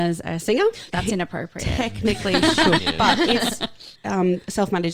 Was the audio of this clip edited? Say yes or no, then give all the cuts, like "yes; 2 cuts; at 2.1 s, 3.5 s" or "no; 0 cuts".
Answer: yes; 3 cuts; at 0.9 s, 2.8 s, 4.0 s